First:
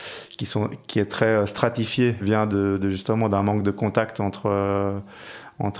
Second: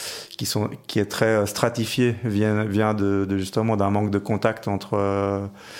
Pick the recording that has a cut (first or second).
first